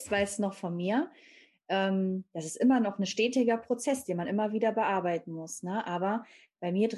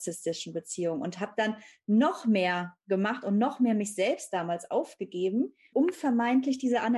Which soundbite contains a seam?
second; 1 cut; at 5.7 s

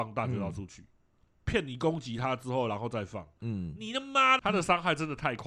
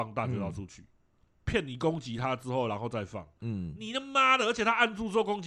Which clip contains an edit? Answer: first; 1 cut; at 4.4 s

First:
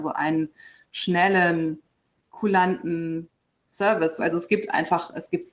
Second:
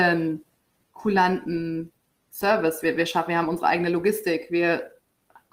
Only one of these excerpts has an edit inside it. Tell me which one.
first; 1 cut; at 4.2 s

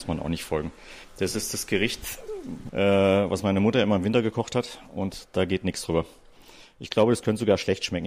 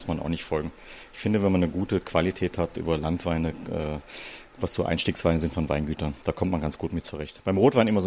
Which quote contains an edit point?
first; 2 cuts; at 1.0 s, 2.7 s

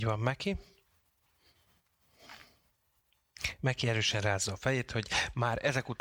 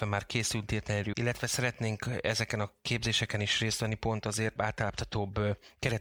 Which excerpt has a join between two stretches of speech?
second; 2 cuts; at 1.1 s, 4.6 s

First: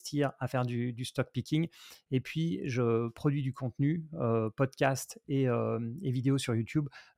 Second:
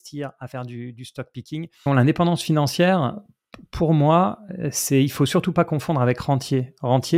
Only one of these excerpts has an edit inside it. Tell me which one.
second; 1 cut; at 1.9 s

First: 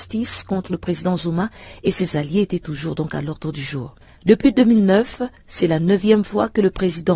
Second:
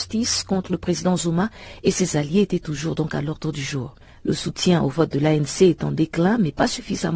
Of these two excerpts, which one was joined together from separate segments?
second; 1 cut; at 4.2 s

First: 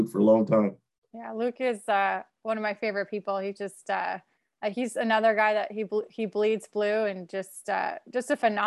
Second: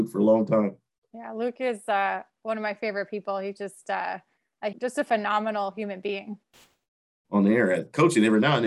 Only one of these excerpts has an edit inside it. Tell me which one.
second; 2 cuts; at 4.7 s, 7.2 s

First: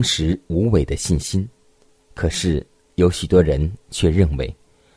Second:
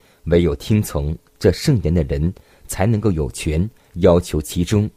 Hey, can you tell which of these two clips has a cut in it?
first; 1 cut; at 2.0 s

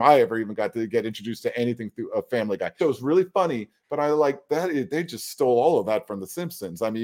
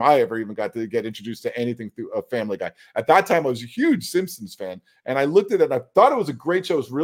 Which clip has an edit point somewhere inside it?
first; 1 cut; at 2.8 s

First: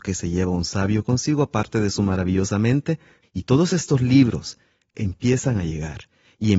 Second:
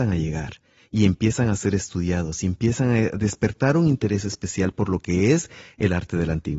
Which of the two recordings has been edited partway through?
first; 2 cuts; at 3.2 s, 4.9 s

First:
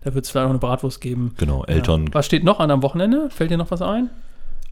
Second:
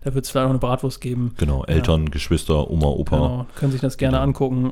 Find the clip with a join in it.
first; 1 cut; at 2.1 s

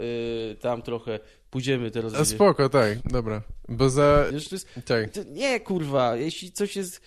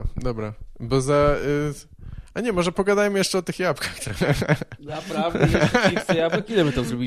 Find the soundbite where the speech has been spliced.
first; 2 cuts; at 3.0 s, 4.3 s

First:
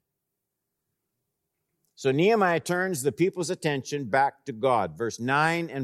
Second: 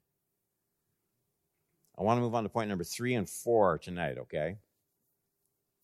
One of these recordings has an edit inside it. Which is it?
first; 1 cut; at 1.9 s

